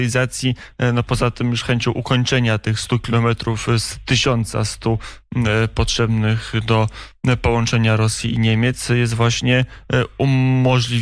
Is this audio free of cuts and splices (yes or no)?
yes